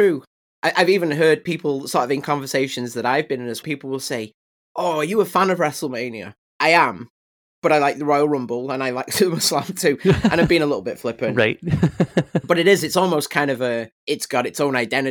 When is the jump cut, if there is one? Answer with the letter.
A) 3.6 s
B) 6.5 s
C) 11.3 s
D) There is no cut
A